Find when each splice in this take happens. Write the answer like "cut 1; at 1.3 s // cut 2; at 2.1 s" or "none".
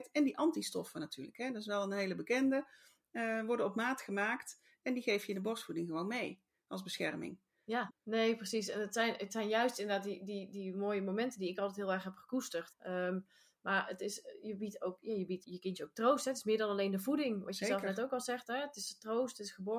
cut 1; at 7.9 s // cut 2; at 12.7 s // cut 3; at 15.4 s